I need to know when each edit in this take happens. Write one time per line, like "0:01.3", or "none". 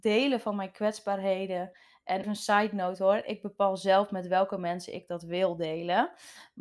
0:02.2